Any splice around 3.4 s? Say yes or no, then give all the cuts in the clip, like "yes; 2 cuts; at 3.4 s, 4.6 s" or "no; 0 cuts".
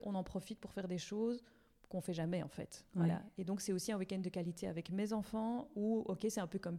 no; 0 cuts